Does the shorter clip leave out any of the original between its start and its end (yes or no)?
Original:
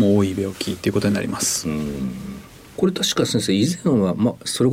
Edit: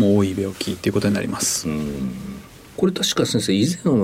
no